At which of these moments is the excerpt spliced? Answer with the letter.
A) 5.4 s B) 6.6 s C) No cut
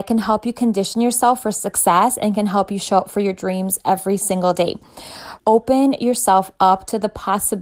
A